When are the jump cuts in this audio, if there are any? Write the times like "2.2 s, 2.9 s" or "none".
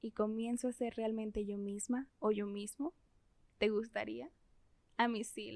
none